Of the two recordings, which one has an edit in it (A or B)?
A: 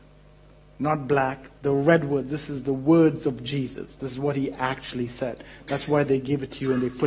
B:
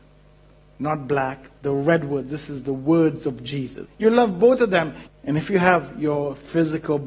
B